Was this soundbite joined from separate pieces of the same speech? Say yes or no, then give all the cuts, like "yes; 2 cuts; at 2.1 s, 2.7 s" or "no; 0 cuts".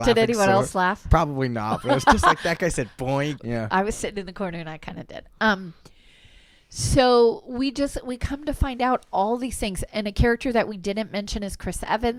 yes; 1 cut; at 3.4 s